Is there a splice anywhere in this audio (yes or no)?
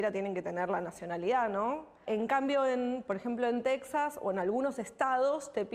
yes